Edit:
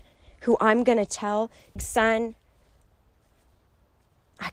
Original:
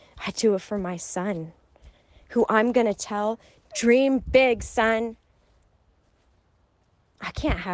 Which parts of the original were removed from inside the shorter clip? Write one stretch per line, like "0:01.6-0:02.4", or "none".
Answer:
0:03.6-0:04.6